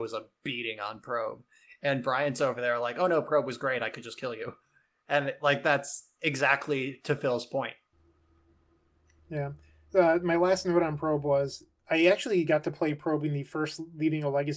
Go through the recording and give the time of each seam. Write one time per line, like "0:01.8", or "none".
none